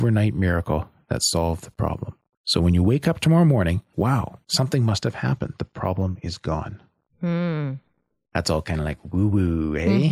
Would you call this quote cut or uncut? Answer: cut